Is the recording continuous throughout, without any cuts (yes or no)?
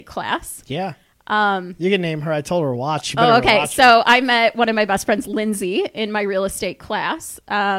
yes